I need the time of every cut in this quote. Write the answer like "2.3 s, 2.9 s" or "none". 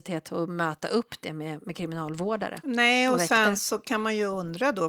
none